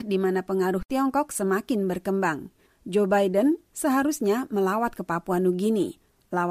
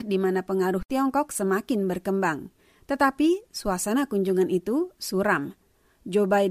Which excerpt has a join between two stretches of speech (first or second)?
first